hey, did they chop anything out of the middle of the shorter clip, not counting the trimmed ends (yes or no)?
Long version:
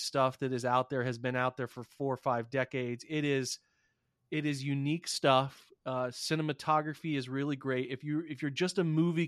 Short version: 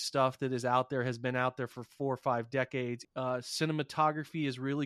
yes